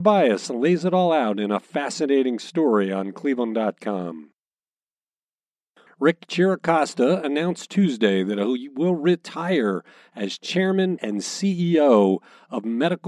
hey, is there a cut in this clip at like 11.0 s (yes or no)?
yes